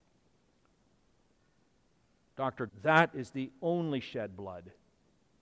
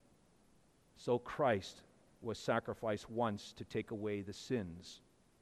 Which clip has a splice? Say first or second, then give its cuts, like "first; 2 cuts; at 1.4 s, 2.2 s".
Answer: first; 1 cut; at 2.7 s